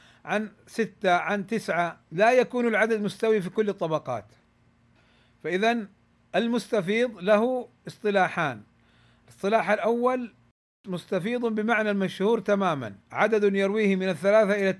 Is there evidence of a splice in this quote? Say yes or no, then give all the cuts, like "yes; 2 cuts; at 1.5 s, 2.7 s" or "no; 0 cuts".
yes; 2 cuts; at 2.0 s, 13.0 s